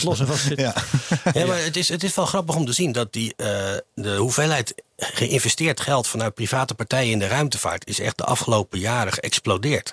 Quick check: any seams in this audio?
no; 0 cuts

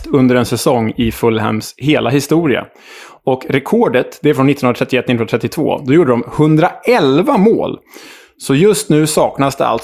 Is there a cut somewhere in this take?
no; 0 cuts

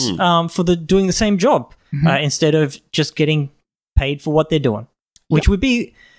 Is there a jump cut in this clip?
no; 0 cuts

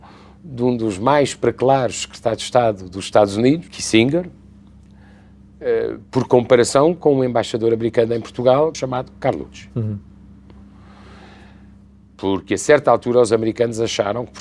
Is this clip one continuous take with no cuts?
no; 2 cuts; at 3.7 s, 8.7 s

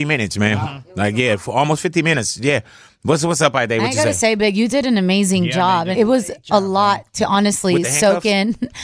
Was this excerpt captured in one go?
no; 1 cut; at 5.9 s

